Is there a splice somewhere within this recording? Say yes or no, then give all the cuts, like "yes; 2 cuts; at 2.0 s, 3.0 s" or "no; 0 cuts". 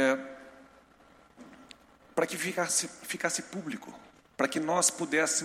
no; 0 cuts